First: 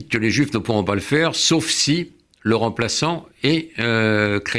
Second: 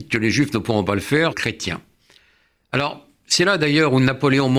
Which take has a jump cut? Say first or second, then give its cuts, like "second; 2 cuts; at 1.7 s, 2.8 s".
second; 1 cut; at 1.3 s